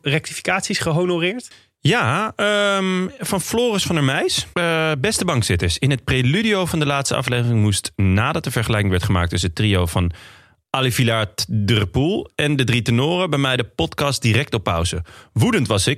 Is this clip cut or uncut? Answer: cut